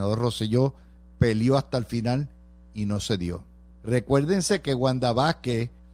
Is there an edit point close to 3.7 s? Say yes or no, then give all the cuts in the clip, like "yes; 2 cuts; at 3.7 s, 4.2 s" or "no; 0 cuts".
yes; 1 cut; at 3.7 s